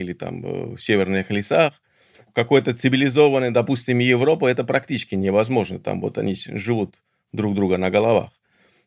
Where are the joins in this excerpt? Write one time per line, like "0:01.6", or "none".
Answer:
none